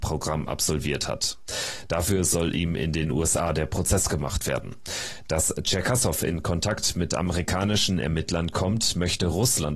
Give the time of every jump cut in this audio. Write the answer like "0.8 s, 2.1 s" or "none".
none